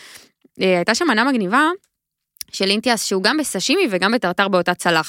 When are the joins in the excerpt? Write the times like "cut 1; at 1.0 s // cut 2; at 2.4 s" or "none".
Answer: none